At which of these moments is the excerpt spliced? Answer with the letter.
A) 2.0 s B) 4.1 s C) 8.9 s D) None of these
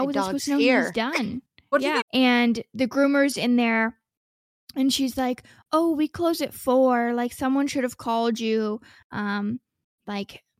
A